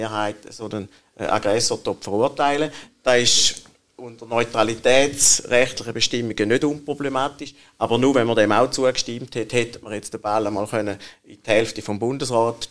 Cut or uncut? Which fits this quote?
uncut